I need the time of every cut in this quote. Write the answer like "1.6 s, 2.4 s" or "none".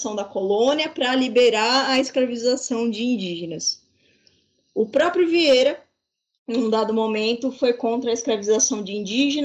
none

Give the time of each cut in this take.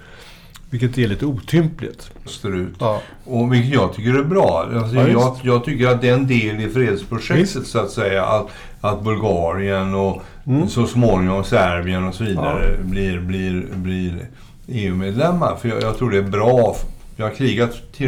2.3 s

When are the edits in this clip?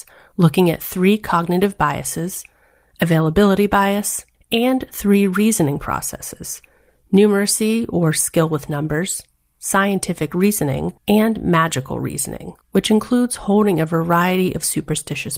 4.3 s, 11.0 s, 12.6 s

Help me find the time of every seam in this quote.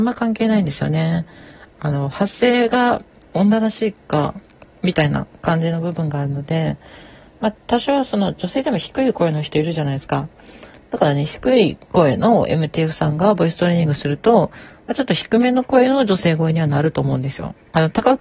1.7 s

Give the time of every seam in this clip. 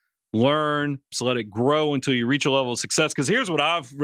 1.1 s

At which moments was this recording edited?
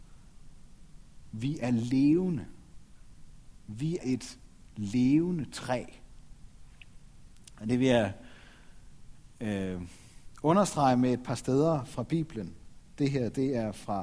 4.0 s

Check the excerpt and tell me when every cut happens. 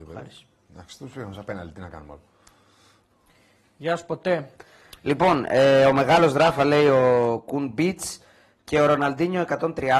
none

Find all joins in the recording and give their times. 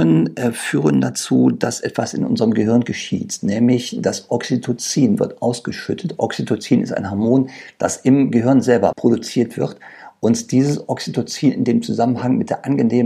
8.9 s

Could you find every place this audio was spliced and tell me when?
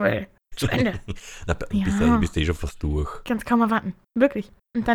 none

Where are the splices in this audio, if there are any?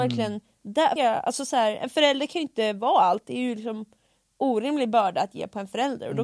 1.0 s

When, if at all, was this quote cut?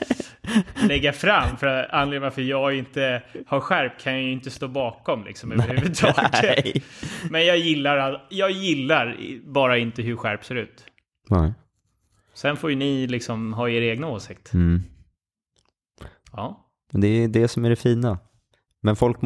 16.2 s

